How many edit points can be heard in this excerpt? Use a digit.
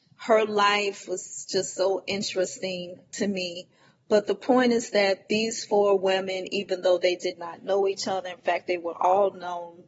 0